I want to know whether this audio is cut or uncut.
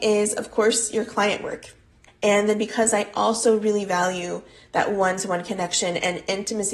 cut